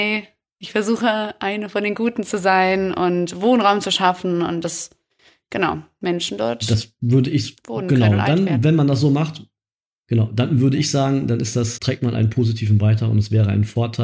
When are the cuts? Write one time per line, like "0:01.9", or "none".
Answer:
0:11.8